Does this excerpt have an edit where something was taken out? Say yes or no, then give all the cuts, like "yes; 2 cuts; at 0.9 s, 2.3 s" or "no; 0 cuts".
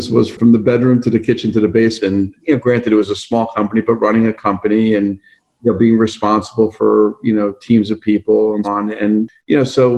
yes; 2 cuts; at 2.0 s, 8.6 s